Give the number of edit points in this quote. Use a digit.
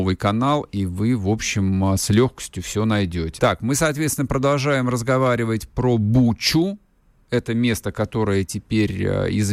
1